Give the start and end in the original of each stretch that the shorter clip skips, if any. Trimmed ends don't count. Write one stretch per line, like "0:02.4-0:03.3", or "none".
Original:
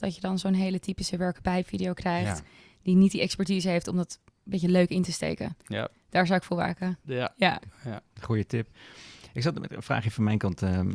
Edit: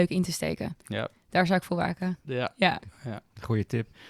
none